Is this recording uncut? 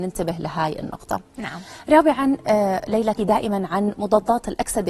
no; 1 cut; at 3.2 s

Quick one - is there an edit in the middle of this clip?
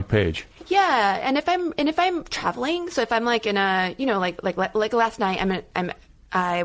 no; 0 cuts

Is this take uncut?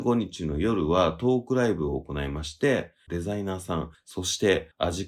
no; 1 cut; at 3.1 s

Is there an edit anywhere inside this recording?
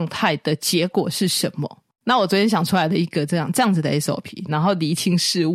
yes; 2 cuts; at 1.9 s, 4.5 s

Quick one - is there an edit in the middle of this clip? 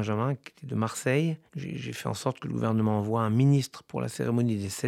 yes; 1 cut; at 1.5 s

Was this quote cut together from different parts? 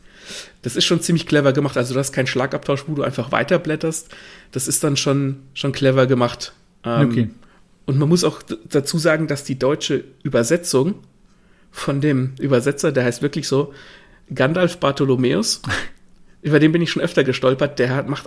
no; 0 cuts

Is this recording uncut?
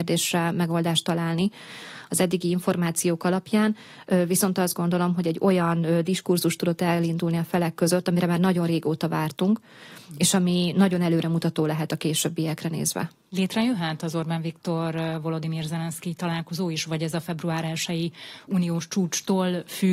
yes; 0 cuts

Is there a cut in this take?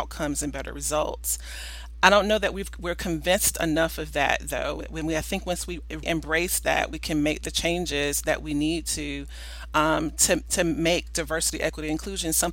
yes; 1 cut; at 6.0 s

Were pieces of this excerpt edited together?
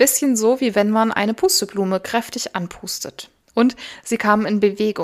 yes; 1 cut; at 3.4 s

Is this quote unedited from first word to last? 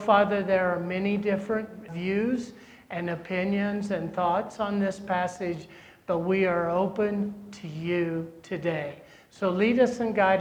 no; 1 cut; at 1.9 s

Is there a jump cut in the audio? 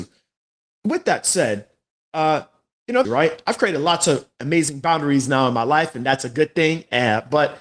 yes; 1 cut; at 3.0 s

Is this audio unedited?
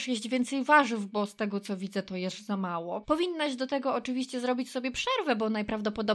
no; 1 cut; at 3.0 s

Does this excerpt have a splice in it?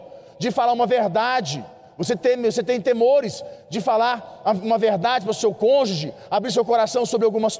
no; 0 cuts

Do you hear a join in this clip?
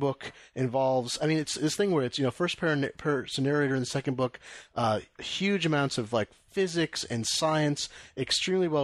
no; 0 cuts

